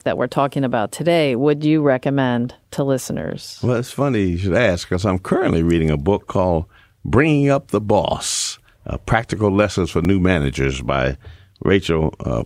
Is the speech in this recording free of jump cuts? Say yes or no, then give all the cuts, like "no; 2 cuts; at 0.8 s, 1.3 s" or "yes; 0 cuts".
yes; 0 cuts